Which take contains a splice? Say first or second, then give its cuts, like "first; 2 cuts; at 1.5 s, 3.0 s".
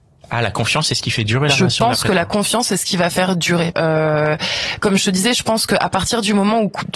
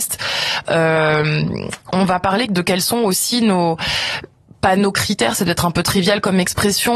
first; 1 cut; at 3.7 s